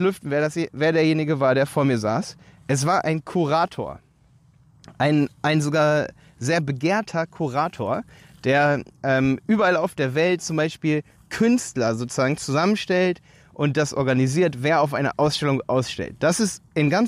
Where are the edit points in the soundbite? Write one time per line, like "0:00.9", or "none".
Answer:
none